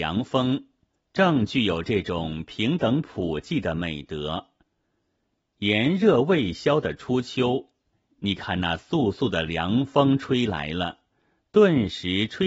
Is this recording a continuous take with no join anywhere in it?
no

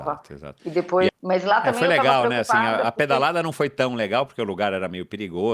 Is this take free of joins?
no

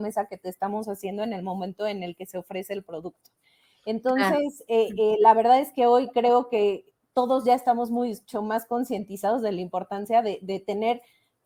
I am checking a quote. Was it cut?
no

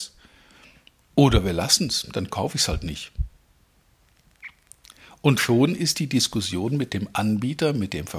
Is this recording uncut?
yes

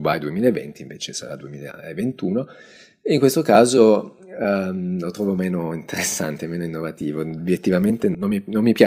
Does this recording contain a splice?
no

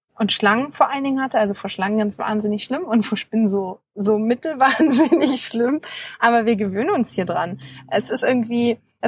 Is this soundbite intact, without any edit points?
yes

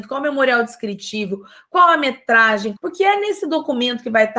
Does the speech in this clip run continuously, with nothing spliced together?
no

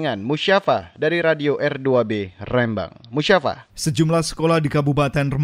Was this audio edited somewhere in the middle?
yes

